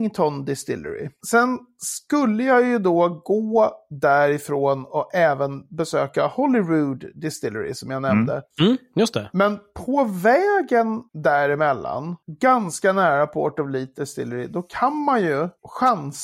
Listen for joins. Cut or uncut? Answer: cut